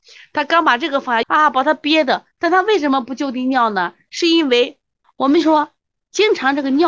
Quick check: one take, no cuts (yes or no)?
no